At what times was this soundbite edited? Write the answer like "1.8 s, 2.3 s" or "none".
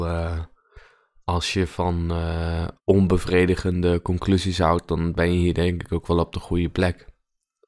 2.8 s